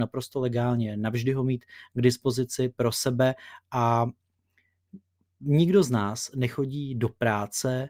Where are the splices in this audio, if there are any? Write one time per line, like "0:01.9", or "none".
none